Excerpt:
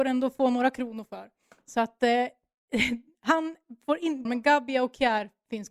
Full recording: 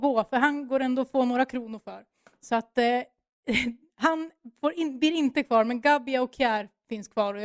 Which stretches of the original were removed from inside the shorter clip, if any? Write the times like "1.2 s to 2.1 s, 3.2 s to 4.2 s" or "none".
5.0 s to 5.6 s